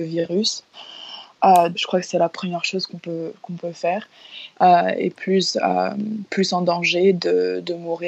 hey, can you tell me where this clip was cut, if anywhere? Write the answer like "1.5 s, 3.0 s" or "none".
1.7 s, 4.5 s